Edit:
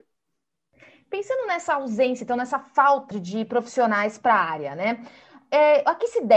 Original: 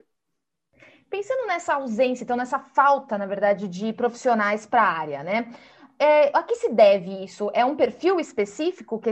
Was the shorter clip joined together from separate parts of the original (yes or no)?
yes